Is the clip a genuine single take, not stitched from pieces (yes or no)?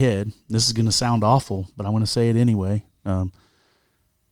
yes